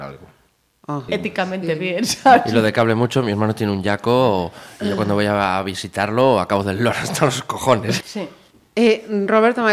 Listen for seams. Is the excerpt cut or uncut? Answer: cut